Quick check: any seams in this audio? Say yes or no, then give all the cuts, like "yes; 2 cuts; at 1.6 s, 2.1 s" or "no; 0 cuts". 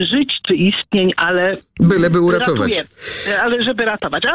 no; 0 cuts